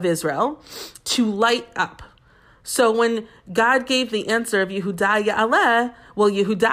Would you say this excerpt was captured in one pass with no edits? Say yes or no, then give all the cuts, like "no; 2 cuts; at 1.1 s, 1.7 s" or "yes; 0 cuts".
yes; 0 cuts